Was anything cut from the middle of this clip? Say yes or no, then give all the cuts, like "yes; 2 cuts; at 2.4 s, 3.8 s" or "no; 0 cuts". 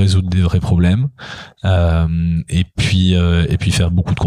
no; 0 cuts